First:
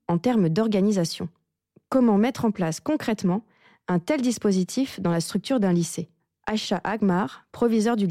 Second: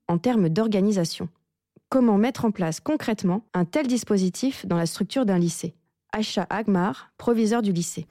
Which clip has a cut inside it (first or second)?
second